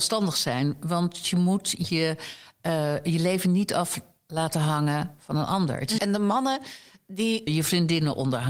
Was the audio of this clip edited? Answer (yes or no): yes